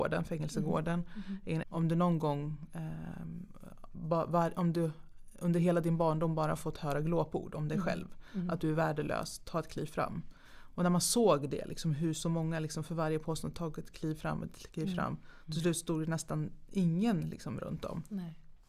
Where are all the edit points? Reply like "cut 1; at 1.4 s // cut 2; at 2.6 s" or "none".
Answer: cut 1; at 1.6 s